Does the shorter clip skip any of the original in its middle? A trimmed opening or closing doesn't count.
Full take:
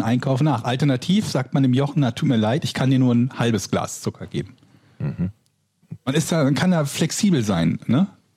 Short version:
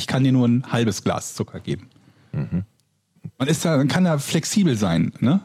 no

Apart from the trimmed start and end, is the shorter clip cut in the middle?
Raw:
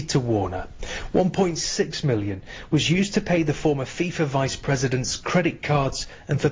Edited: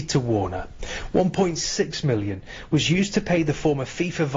no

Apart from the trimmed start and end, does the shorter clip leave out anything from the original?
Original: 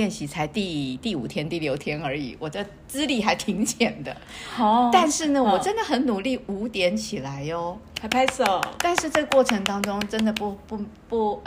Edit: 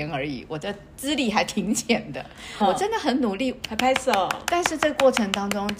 yes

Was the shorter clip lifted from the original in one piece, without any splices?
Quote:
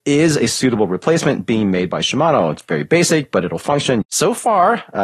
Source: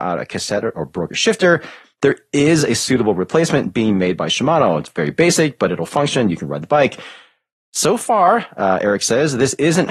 no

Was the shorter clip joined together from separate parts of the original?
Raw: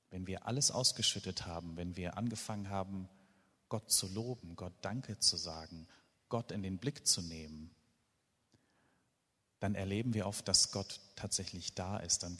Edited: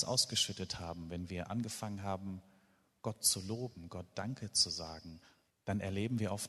yes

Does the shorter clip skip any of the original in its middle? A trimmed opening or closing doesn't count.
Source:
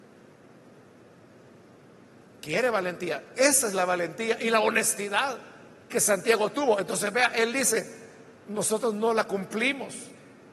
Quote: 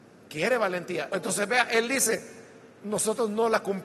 yes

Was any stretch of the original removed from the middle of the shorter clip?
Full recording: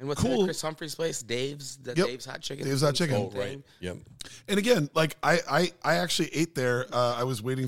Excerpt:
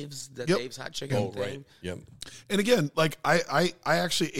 yes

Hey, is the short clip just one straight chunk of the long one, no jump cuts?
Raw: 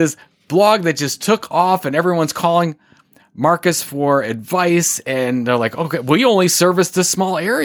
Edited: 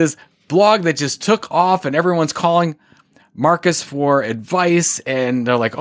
yes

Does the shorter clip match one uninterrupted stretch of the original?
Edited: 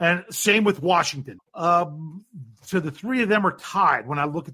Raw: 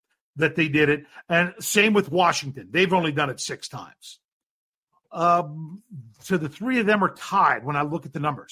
no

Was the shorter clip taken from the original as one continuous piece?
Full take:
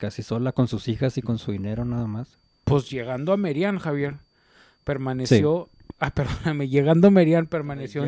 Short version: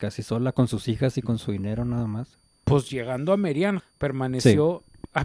no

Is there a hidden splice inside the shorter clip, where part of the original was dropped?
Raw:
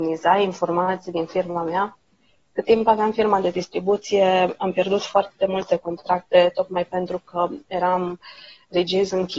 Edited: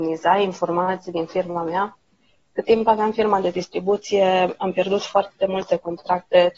no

